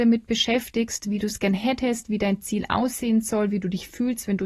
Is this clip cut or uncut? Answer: uncut